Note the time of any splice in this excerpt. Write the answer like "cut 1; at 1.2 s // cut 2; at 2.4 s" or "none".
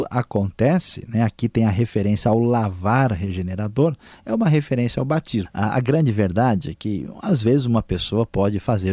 cut 1; at 5.4 s